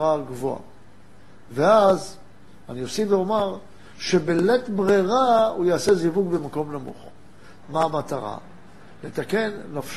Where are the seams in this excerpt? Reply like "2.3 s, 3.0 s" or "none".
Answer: 7.6 s